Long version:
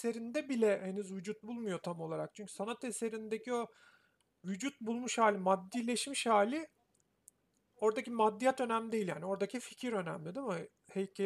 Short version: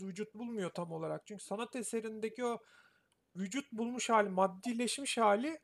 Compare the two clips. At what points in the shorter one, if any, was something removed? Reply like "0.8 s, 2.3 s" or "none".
none